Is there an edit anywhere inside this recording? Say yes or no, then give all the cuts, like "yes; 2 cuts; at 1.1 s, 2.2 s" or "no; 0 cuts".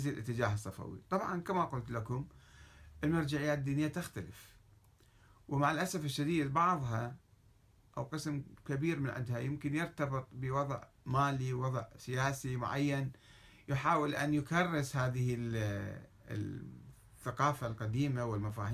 no; 0 cuts